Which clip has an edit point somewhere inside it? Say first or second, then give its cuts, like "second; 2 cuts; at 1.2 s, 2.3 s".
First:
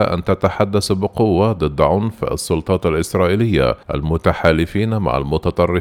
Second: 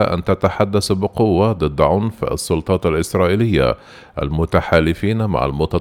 first; 1 cut; at 3.8 s